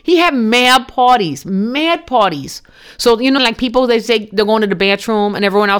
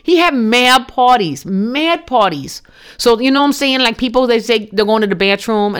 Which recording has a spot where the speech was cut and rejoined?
first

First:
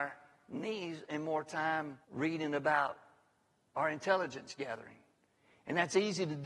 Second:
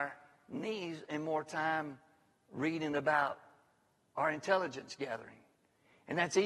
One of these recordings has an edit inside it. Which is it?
first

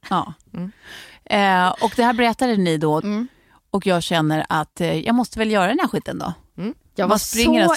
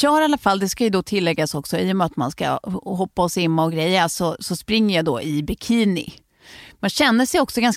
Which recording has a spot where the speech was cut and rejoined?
first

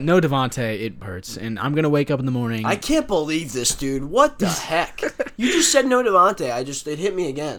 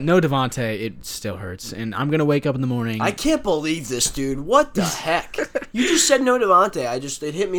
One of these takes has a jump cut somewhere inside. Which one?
first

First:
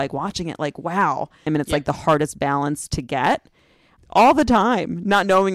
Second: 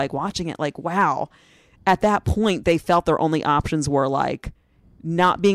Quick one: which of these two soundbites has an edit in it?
first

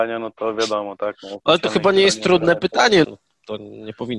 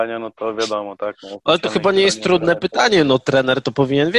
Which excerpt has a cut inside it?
first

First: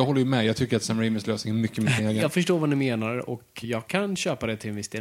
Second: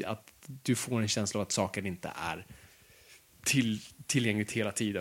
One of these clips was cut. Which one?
first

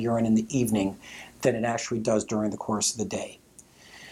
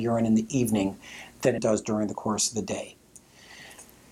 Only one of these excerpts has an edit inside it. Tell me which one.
second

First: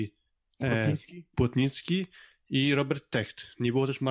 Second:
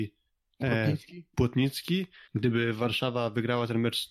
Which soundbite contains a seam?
second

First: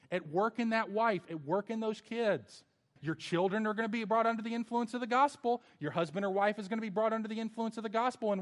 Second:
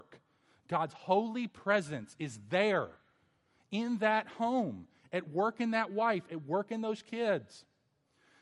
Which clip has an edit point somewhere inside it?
first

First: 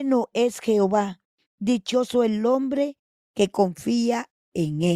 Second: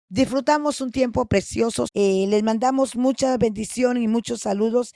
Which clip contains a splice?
second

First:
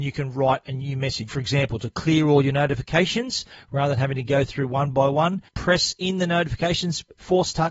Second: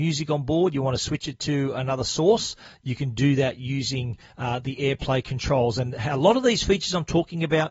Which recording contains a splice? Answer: first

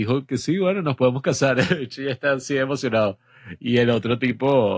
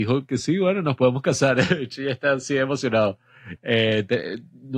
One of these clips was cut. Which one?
second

